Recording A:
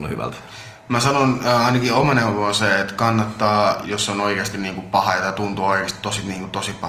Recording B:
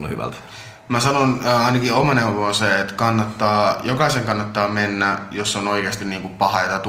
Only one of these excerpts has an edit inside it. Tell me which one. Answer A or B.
A